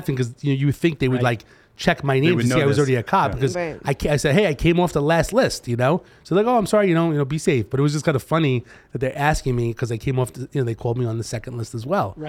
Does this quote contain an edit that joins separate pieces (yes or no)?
no